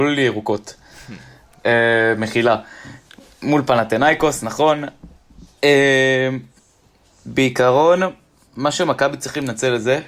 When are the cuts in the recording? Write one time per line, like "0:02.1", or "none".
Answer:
none